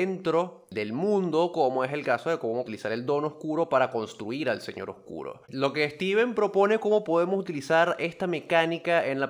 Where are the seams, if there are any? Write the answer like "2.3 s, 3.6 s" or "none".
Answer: 5.4 s